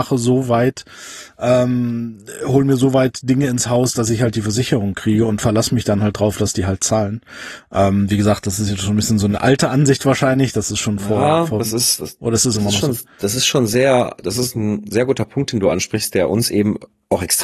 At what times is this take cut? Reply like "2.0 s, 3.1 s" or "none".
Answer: none